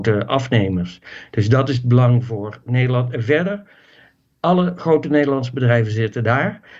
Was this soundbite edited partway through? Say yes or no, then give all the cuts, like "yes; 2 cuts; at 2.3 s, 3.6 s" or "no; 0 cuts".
no; 0 cuts